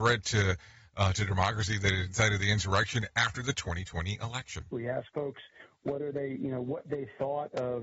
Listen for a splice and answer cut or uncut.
cut